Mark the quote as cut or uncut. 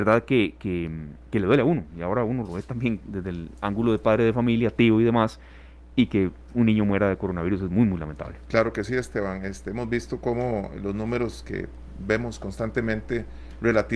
uncut